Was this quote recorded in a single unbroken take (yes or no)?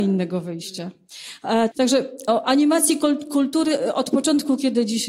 no